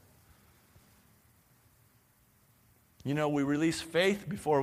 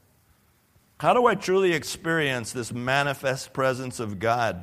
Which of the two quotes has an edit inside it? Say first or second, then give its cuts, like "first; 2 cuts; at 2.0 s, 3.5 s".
second; 1 cut; at 1.0 s